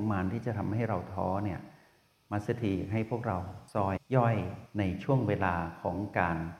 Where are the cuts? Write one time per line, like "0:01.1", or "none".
0:04.0